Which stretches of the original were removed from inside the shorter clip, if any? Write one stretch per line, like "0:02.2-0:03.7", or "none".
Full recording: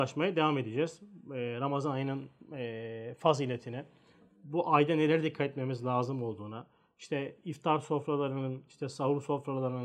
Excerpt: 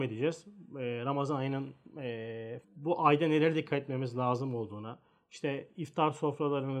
0:03.2-0:04.3

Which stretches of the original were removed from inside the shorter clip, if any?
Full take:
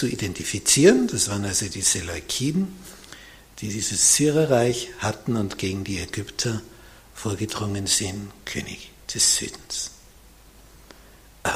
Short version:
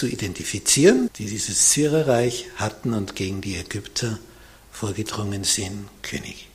0:01.1-0:03.5

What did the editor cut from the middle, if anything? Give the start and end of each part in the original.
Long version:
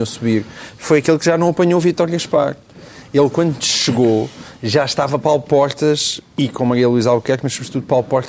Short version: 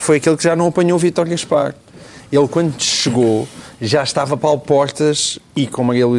none

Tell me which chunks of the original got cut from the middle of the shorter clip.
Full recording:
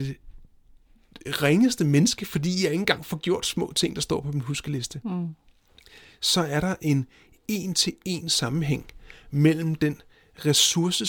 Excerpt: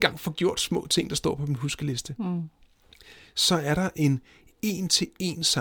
none

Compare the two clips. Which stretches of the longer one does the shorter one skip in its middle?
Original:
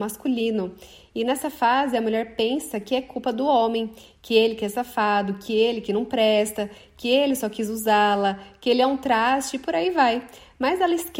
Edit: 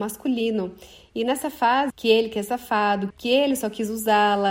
0:01.9-0:04.2
0:05.4-0:06.9

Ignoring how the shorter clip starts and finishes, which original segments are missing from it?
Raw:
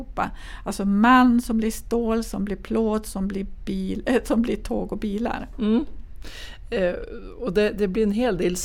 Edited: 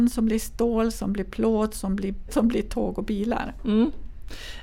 0:03.6-0:04.2

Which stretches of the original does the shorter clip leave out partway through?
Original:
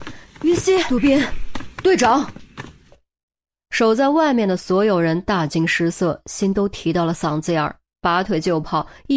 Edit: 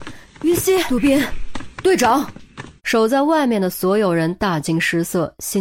0:02.8-0:03.6

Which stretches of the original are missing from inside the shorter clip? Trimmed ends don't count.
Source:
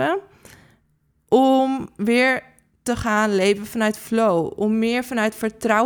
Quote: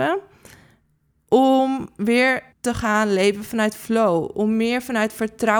0:02.5-0:02.7

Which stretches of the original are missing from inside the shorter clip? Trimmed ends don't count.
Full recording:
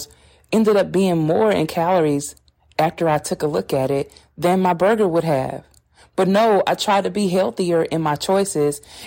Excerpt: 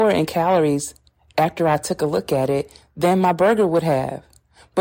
none

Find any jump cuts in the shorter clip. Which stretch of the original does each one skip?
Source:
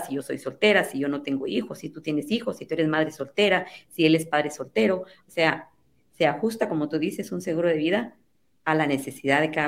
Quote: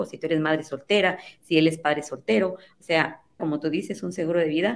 0:05.9-0:06.7

